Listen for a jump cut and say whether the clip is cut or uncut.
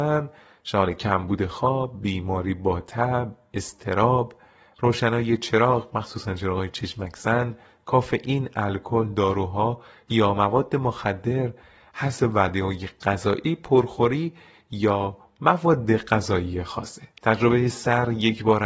cut